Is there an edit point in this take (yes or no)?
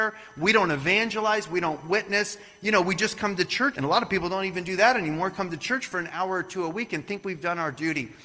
yes